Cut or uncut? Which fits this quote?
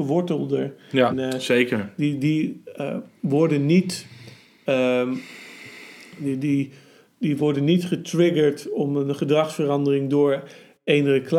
cut